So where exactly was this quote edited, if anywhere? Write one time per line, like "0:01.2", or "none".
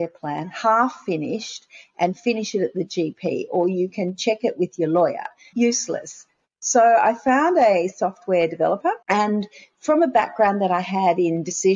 0:05.5
0:09.0